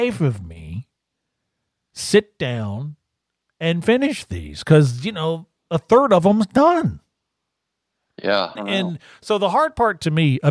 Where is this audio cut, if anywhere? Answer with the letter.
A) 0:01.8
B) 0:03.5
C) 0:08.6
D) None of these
C